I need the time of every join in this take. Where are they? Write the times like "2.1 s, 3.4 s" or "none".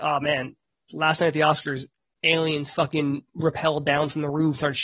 none

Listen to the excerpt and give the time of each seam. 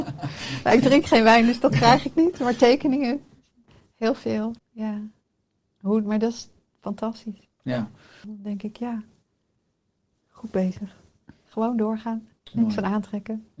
4.6 s, 8.2 s

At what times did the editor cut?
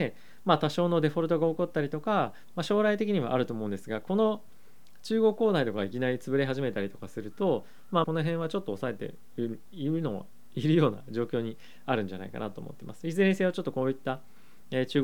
2.5 s, 8.0 s

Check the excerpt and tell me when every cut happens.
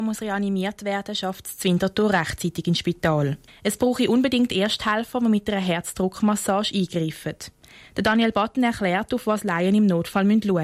3.5 s

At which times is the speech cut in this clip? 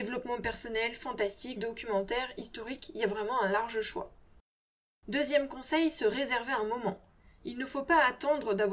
1.6 s

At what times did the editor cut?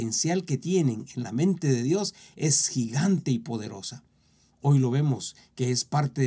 none

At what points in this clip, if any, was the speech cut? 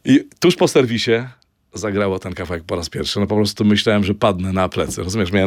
1.6 s

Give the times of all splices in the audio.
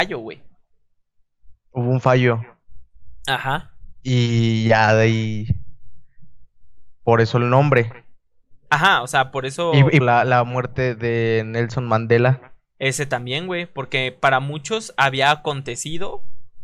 10.0 s

